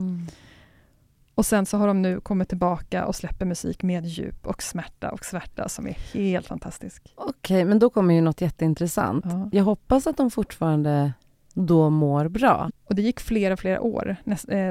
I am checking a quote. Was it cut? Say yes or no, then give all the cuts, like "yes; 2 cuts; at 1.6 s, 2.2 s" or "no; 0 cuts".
yes; 1 cut; at 12.7 s